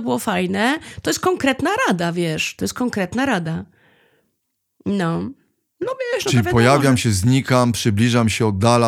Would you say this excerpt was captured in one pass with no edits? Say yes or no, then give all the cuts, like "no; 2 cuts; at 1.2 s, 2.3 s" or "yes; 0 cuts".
yes; 0 cuts